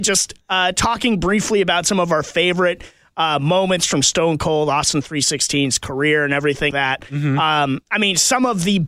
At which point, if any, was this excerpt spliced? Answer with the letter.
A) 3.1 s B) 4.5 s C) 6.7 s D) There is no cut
C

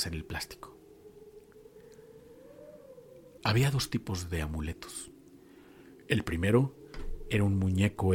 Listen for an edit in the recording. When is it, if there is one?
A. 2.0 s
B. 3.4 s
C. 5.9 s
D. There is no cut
B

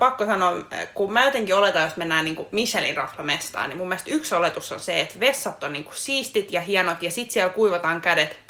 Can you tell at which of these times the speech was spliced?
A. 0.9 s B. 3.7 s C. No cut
C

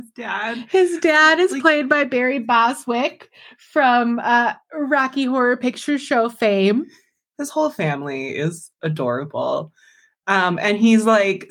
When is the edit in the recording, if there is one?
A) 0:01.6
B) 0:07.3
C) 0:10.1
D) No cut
B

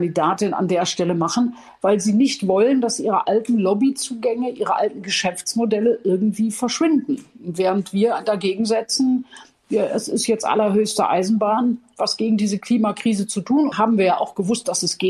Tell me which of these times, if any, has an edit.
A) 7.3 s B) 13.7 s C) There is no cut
B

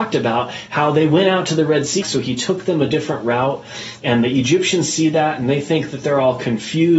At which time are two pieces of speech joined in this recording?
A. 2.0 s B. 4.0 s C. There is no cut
A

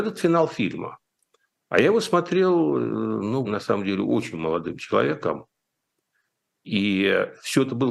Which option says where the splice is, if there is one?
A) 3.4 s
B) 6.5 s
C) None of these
A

